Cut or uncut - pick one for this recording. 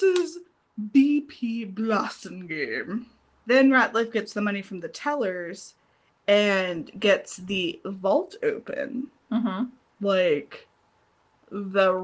cut